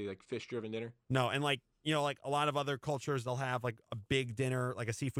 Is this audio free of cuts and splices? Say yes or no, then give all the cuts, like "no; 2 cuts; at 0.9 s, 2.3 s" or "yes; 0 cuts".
yes; 0 cuts